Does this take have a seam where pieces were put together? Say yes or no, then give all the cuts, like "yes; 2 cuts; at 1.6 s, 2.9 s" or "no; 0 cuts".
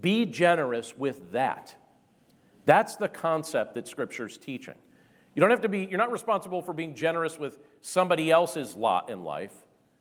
no; 0 cuts